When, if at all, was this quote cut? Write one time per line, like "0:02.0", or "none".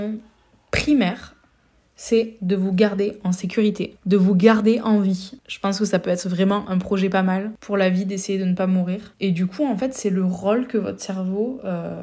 none